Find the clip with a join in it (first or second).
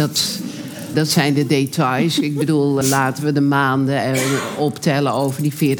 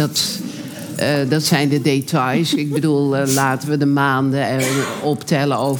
first